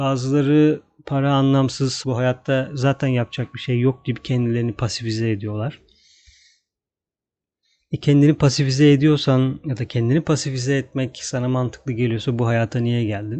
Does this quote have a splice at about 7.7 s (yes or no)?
no